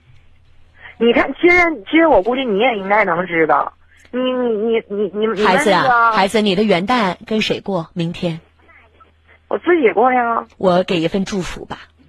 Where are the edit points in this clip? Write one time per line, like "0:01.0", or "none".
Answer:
0:10.5